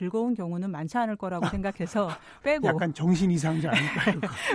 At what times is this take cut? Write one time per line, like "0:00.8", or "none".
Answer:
0:02.4